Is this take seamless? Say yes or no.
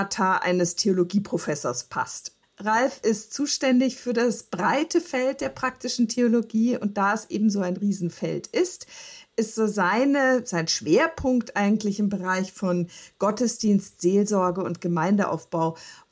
no